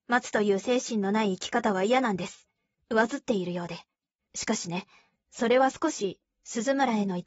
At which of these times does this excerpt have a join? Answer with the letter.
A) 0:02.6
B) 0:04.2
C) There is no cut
B